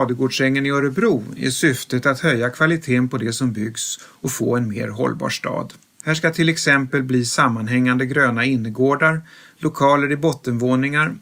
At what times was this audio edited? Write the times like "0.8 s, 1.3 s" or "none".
6.0 s